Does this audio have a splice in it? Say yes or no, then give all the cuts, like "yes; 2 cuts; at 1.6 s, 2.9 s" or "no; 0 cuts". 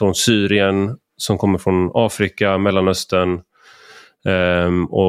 no; 0 cuts